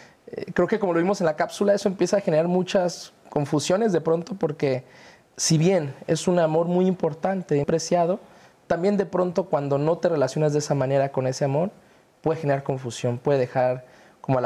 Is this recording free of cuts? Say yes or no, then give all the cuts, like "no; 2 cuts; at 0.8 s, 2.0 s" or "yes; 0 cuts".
no; 1 cut; at 7.6 s